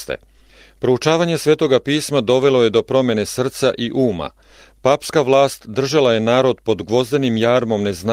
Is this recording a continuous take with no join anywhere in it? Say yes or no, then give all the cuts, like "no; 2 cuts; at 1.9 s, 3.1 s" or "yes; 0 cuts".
yes; 0 cuts